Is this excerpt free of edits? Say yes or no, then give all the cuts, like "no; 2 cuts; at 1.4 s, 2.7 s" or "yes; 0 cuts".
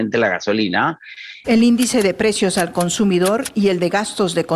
no; 1 cut; at 1.4 s